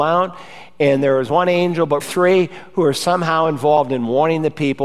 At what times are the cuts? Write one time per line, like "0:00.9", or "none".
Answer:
0:02.0